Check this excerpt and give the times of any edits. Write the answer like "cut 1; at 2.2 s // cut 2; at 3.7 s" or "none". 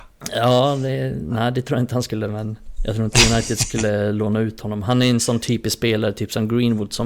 none